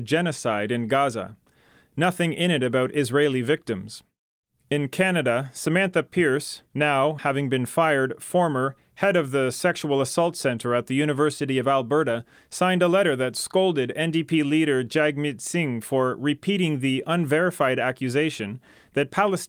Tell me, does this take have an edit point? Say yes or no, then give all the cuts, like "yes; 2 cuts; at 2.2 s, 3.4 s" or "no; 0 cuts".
no; 0 cuts